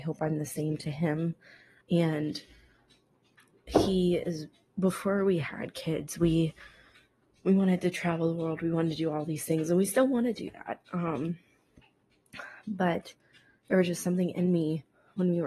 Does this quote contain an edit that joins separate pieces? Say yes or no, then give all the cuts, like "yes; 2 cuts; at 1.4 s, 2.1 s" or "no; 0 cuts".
yes; 1 cut; at 1.8 s